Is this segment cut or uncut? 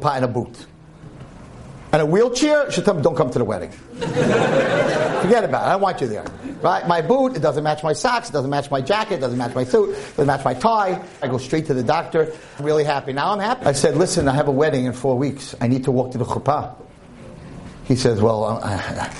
cut